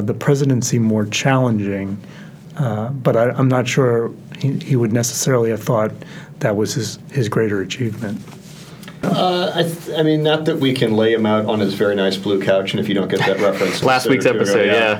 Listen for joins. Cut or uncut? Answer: cut